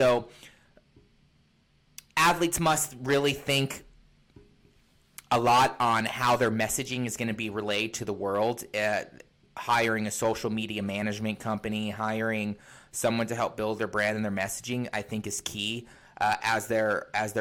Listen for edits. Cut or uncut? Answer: uncut